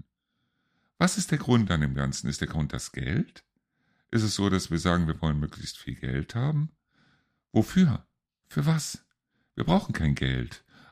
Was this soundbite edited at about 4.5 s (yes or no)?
no